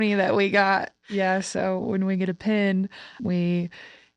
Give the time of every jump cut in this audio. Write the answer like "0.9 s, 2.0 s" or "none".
3.2 s